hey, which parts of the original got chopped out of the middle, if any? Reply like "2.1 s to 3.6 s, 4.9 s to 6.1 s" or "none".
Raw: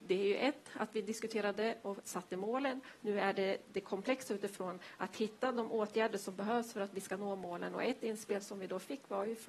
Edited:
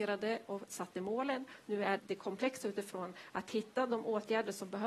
3.3 s to 3.6 s